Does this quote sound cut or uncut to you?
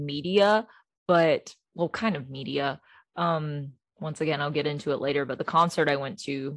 uncut